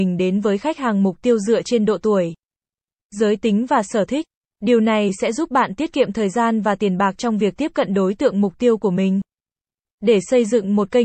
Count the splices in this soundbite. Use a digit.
0